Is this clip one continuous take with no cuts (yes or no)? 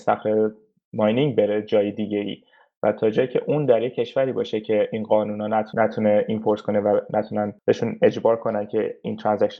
yes